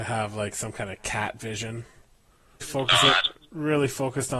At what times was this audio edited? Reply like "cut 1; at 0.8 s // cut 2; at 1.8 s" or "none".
cut 1; at 2.6 s